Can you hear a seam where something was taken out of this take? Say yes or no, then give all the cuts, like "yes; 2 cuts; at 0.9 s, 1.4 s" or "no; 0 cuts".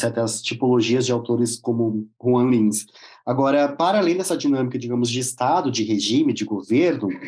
no; 0 cuts